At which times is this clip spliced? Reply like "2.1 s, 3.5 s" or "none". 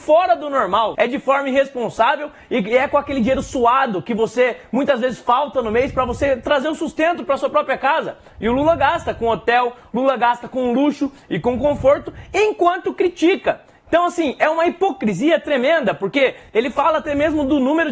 0.9 s